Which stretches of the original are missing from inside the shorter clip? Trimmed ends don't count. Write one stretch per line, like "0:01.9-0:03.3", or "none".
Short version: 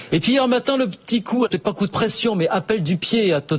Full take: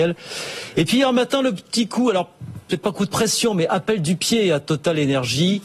0:02.1-0:02.7